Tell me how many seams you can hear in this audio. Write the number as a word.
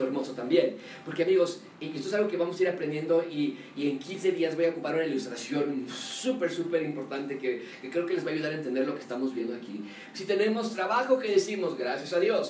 one